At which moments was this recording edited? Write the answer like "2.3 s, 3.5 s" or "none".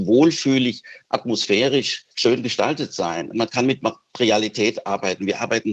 2.1 s, 3.3 s